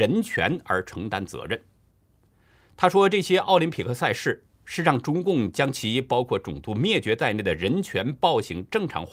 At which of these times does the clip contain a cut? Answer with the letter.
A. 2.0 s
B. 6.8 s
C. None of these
C